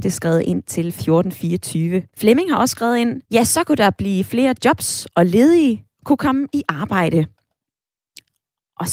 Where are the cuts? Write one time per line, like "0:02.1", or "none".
0:02.1
0:03.2